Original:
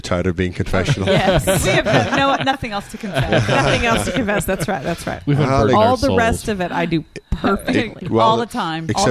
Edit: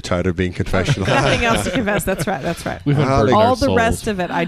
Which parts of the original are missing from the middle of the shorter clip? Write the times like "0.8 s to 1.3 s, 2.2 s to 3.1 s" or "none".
1.1 s to 3.5 s